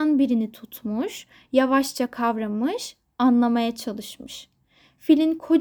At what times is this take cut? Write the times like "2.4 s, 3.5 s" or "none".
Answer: none